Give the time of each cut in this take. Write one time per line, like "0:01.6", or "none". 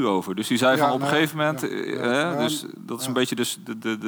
none

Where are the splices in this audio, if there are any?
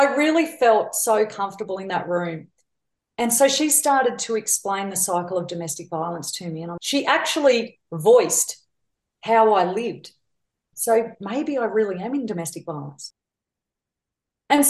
0:06.8
0:10.7

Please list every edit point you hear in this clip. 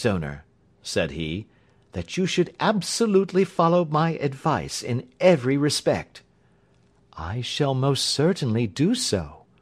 none

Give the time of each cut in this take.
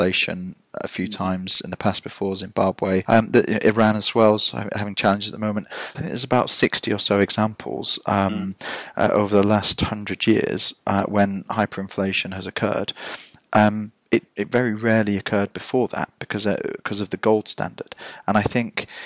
0:05.9

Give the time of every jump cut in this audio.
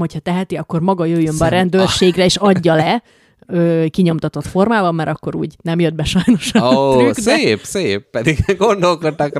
none

